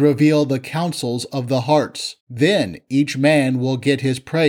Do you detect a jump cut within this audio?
yes; 1 cut; at 2.2 s

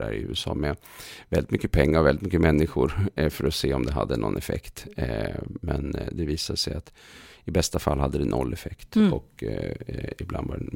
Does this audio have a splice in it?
no; 0 cuts

